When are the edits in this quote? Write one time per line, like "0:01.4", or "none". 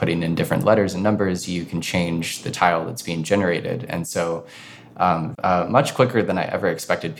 0:05.3